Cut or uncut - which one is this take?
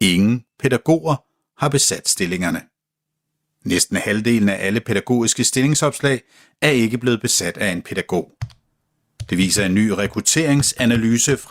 uncut